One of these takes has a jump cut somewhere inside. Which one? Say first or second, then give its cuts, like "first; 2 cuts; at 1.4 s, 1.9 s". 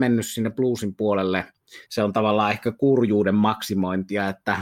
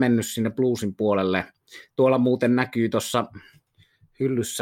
first; 1 cut; at 1.9 s